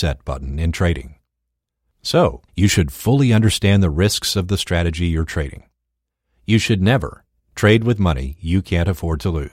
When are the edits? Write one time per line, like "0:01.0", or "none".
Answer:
0:02.5
0:07.4